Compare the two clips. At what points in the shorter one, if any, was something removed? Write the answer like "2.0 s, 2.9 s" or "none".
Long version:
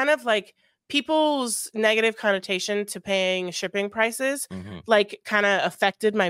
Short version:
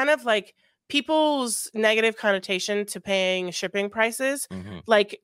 none

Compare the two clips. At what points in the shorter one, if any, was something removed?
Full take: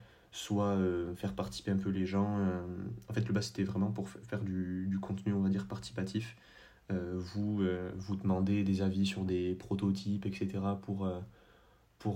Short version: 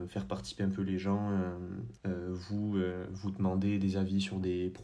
2.0 s

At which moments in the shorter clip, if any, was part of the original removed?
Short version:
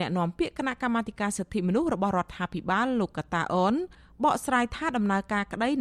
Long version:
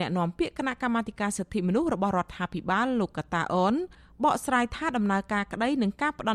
none

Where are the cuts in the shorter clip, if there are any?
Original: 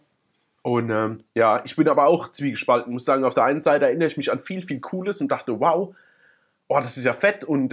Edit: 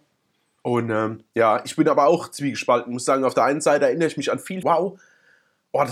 4.6 s

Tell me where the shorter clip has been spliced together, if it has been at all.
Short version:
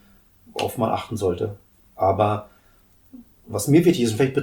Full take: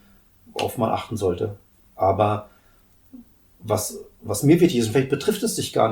3.4 s

